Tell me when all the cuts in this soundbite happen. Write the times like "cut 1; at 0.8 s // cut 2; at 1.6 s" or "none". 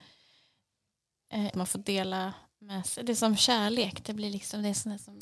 cut 1; at 1.5 s